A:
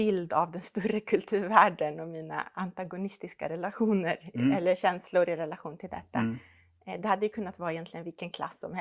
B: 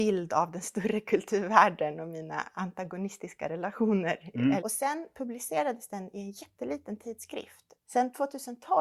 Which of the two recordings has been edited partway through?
B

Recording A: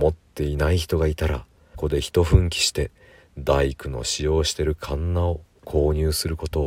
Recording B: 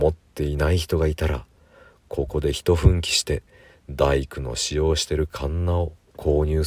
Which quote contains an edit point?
A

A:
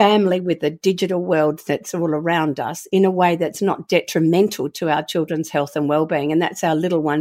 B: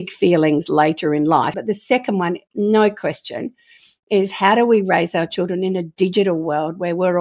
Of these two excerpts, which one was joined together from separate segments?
B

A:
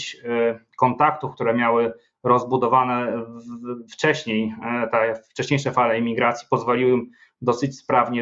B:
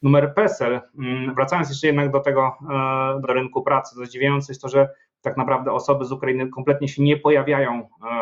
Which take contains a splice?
B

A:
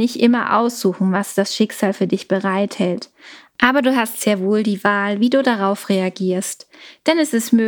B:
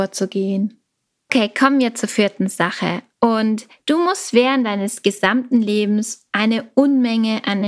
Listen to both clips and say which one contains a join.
B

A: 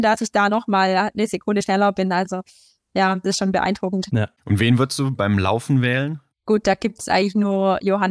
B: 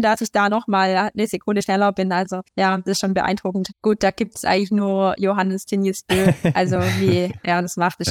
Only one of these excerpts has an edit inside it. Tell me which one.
B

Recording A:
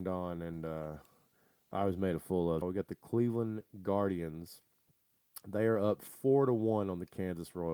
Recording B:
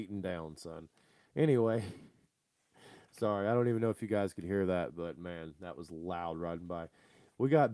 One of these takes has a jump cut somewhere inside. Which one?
A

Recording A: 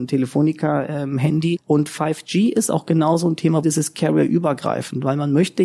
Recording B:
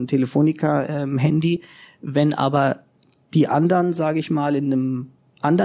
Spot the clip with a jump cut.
A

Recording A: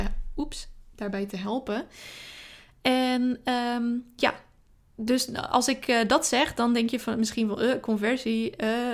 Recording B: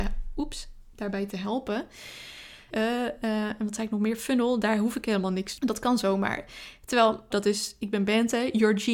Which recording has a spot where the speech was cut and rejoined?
B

